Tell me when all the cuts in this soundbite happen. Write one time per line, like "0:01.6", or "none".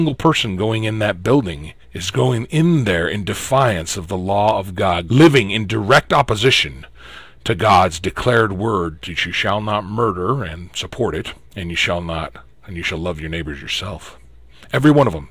0:01.8
0:05.1
0:11.4